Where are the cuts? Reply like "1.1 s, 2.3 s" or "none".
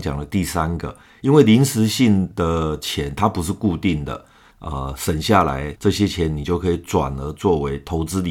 4.5 s, 5.8 s